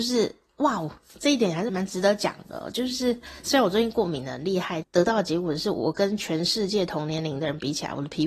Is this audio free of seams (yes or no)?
no